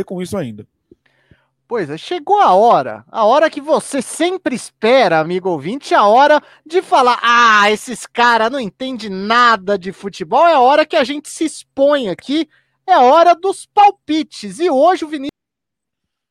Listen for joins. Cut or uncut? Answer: uncut